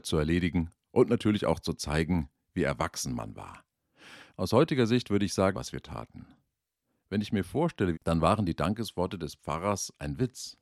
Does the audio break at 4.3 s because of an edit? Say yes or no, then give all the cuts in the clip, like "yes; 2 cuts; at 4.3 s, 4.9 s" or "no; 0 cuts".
yes; 3 cuts; at 4.3 s, 5.5 s, 7.9 s